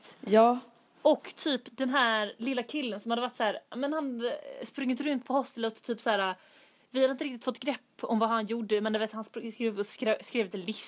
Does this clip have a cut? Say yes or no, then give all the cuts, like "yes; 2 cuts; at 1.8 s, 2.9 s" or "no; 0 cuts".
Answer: no; 0 cuts